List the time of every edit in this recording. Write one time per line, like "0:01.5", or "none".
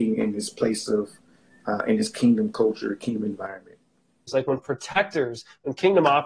0:04.3